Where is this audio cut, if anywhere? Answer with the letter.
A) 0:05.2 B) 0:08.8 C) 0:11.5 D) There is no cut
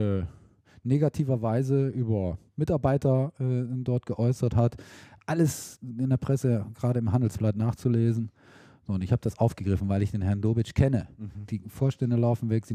C